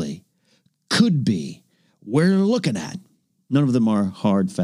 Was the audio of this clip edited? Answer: no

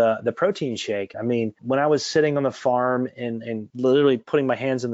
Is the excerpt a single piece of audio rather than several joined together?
no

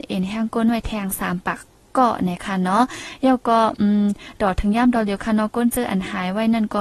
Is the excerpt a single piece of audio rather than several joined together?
yes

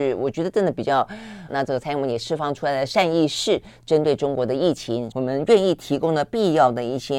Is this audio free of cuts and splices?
no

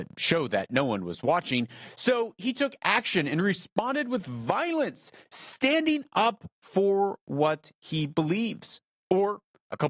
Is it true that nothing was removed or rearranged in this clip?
yes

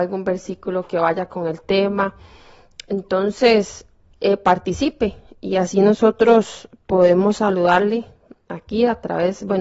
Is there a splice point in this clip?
no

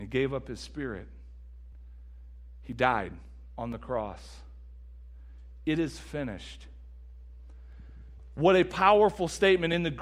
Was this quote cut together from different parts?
no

